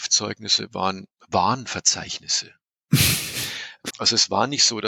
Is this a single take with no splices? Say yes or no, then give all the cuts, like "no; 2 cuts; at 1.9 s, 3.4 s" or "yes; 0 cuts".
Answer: no; 2 cuts; at 1.2 s, 3.9 s